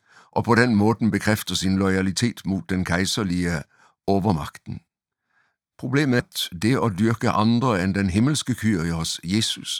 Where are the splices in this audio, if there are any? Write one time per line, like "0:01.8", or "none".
0:06.2